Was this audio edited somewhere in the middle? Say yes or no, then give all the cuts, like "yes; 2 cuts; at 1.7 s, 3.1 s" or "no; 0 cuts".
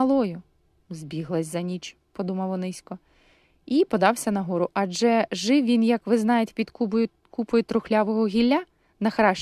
no; 0 cuts